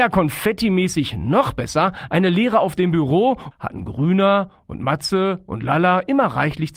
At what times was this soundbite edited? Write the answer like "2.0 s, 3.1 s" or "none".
3.5 s